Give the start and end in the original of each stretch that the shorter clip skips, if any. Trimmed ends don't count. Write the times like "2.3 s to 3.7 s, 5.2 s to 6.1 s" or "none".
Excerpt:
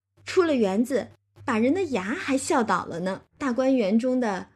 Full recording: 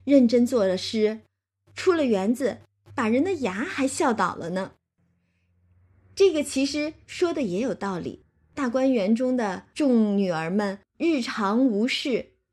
4.8 s to 8.5 s